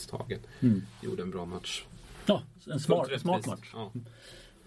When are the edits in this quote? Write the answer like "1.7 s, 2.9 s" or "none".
none